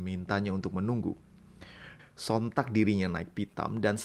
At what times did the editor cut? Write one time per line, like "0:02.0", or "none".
0:02.0